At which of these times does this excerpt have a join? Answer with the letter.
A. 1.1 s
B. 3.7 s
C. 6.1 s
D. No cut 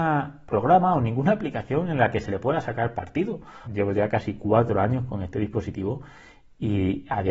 B